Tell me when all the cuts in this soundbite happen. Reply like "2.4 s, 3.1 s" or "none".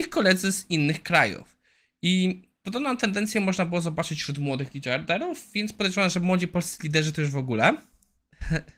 none